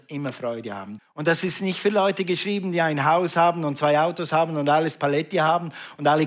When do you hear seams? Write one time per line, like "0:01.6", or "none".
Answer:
0:01.0